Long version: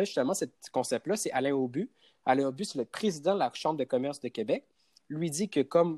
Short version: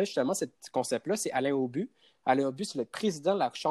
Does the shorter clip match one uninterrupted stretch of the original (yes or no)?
yes